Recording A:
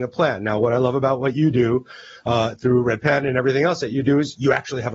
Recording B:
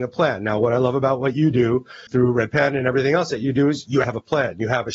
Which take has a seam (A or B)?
B